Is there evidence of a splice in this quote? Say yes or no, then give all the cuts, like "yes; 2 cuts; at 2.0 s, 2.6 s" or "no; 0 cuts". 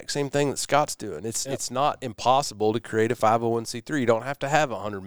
no; 0 cuts